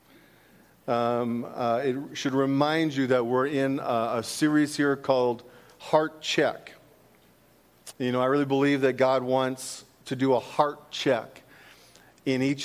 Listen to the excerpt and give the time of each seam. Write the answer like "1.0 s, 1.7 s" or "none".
7.9 s